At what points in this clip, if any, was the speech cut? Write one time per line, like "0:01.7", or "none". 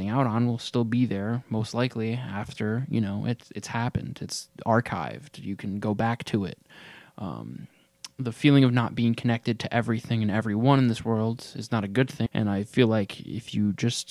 0:12.3